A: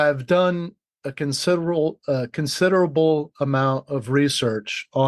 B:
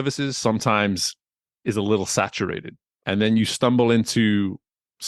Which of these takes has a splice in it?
B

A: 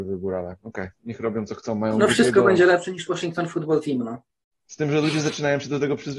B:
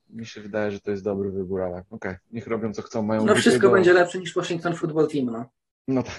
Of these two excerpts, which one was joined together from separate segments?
A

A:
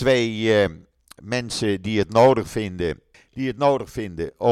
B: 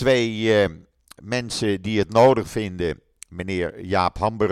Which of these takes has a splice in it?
A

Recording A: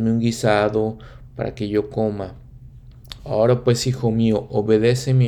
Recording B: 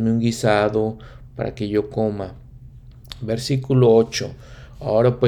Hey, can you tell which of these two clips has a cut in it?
A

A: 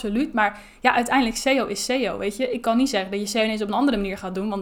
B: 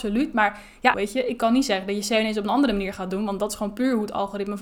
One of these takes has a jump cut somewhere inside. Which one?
B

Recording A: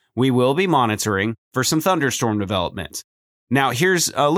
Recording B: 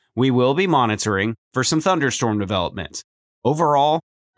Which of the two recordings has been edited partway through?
B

